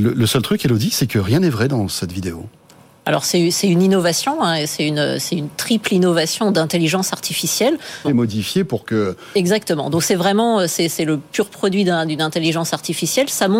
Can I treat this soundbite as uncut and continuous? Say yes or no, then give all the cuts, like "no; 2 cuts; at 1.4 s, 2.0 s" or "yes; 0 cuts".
no; 1 cut; at 8.0 s